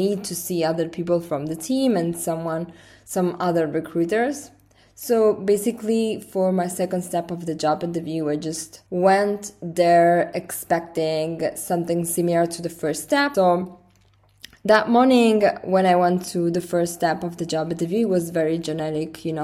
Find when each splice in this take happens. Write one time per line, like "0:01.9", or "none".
0:08.9
0:13.3